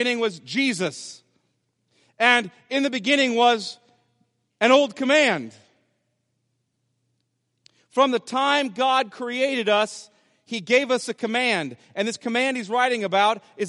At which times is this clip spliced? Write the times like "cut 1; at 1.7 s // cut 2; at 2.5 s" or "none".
none

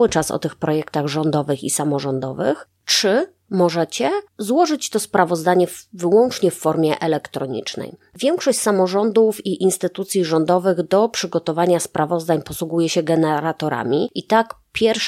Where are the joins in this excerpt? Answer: cut 1; at 4.3 s

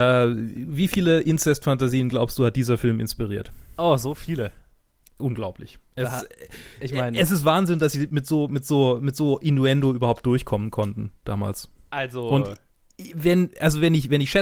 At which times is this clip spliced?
none

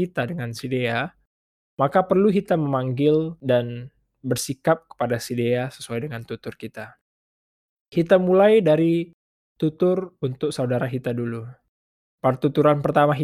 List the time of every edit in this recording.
none

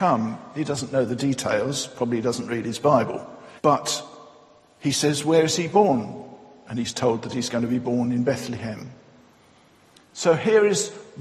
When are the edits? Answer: cut 1; at 3.6 s

